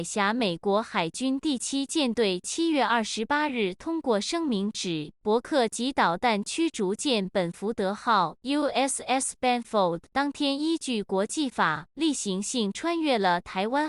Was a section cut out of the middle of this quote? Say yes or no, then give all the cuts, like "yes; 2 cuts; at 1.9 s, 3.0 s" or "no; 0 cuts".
no; 0 cuts